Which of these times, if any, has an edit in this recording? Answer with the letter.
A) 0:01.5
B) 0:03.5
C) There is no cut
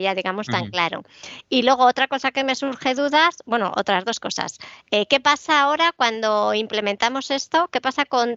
C